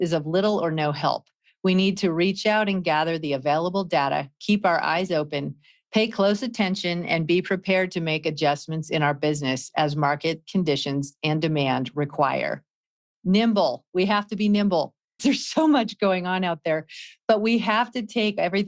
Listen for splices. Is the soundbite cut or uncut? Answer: cut